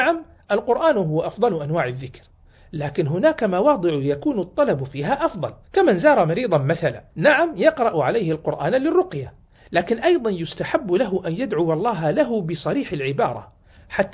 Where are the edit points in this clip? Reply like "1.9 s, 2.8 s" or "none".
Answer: 5.6 s, 7.1 s